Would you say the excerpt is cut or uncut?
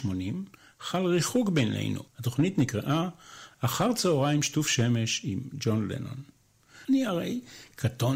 cut